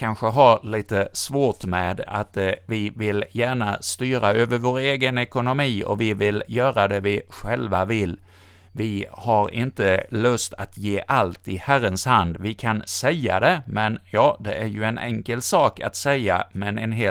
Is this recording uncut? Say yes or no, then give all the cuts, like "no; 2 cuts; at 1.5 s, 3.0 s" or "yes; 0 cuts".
yes; 0 cuts